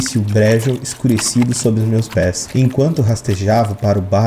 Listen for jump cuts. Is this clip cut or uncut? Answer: uncut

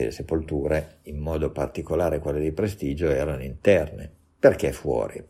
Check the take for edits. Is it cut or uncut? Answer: uncut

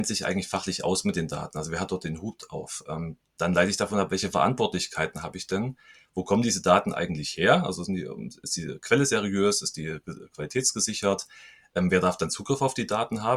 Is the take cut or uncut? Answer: uncut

